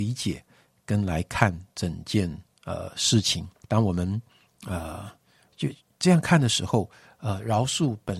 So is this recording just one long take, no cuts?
no; 1 cut; at 3.6 s

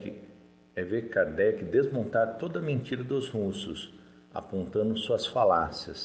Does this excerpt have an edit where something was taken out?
no; 0 cuts

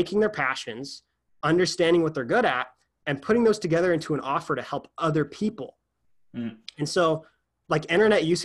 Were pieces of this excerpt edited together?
no; 0 cuts

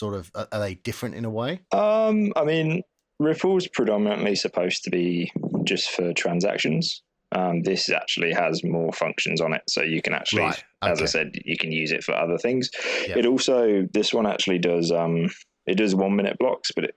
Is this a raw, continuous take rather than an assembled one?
yes; 0 cuts

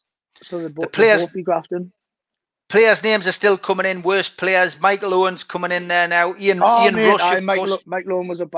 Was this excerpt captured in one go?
yes; 0 cuts

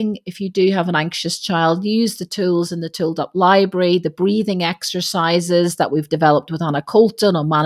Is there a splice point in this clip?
no; 0 cuts

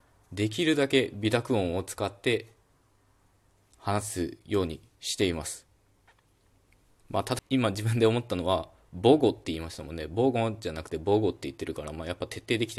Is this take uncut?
no; 1 cut; at 7.4 s

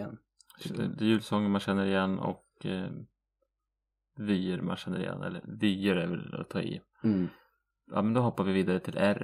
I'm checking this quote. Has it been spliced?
no; 0 cuts

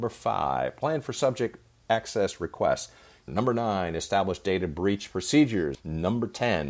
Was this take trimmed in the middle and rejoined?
yes; 2 cuts; at 3.3 s, 5.7 s

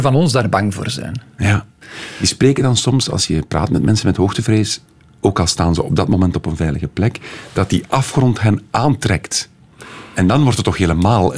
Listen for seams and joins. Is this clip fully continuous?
yes; 0 cuts

